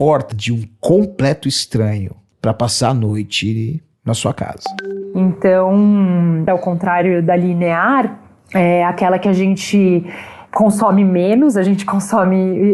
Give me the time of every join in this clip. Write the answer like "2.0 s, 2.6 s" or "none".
6.5 s